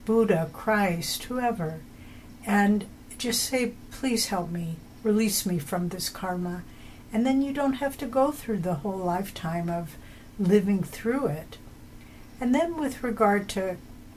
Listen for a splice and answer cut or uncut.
uncut